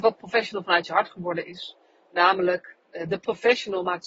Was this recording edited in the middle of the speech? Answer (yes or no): yes